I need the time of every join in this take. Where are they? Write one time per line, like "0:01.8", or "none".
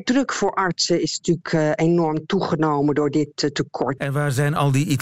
0:04.0